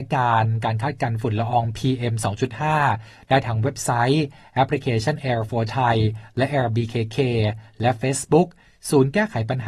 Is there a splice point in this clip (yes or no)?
no